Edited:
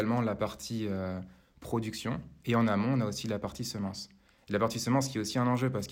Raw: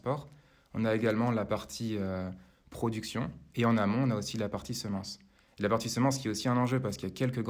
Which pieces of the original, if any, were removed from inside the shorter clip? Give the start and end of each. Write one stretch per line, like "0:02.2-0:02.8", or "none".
none